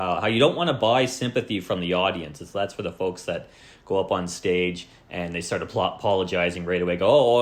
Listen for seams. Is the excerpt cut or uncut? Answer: uncut